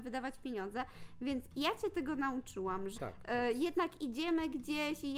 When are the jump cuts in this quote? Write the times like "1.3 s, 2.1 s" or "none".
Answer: 3.0 s